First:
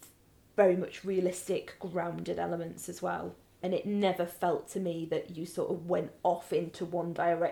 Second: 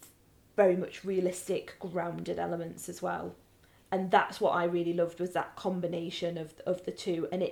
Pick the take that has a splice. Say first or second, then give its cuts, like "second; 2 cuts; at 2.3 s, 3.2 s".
first; 1 cut; at 3.6 s